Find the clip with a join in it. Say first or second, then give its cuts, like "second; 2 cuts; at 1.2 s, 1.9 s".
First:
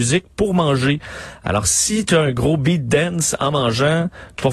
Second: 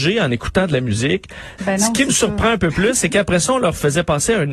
second; 1 cut; at 1.6 s